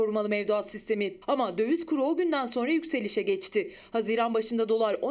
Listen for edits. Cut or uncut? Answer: cut